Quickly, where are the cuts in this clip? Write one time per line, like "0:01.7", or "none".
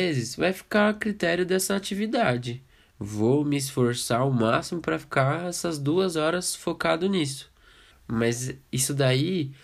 0:02.9
0:07.9

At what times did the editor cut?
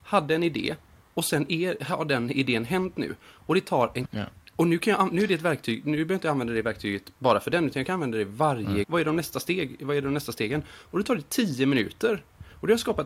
0:04.0
0:08.8

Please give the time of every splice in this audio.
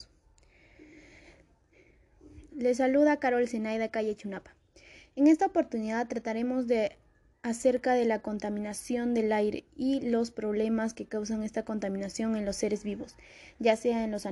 0:02.5

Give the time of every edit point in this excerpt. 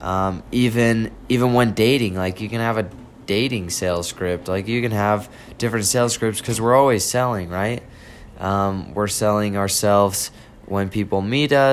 none

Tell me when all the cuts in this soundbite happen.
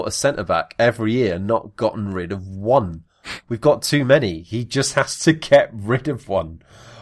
none

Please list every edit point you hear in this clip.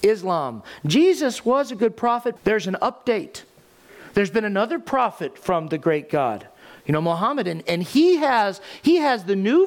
0:02.4

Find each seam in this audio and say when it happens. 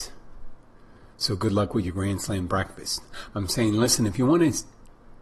0:03.3

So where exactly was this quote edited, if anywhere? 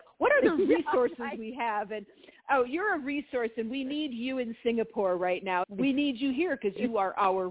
0:05.6

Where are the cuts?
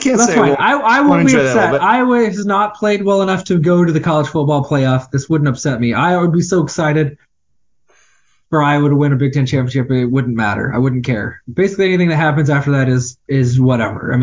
none

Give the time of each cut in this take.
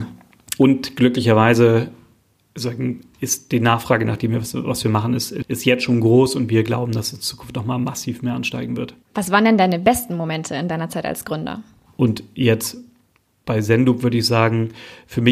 0:05.4
0:11.9

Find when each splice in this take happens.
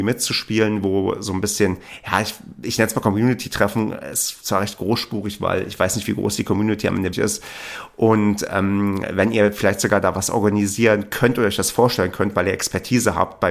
0:07.1

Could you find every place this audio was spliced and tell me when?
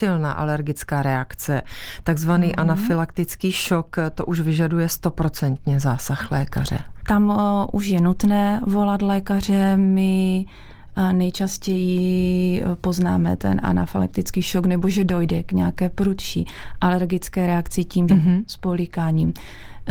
0:07.0
0:18.1

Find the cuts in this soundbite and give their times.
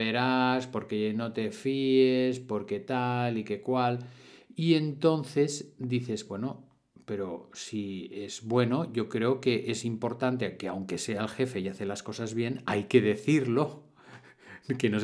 none

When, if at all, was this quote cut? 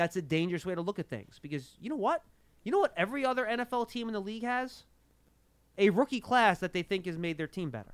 none

